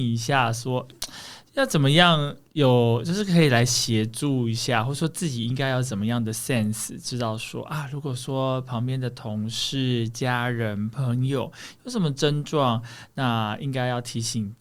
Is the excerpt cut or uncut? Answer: uncut